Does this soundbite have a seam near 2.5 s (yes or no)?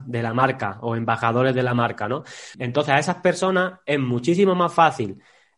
yes